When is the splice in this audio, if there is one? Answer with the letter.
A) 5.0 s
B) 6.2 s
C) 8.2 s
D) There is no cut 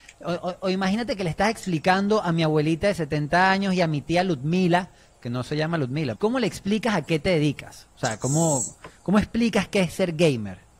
B